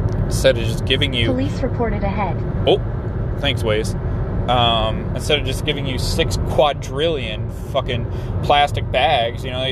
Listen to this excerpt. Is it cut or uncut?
uncut